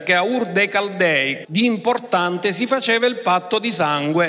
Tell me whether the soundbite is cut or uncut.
cut